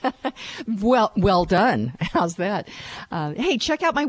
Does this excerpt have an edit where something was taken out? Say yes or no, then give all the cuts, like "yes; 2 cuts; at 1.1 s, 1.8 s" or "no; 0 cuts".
no; 0 cuts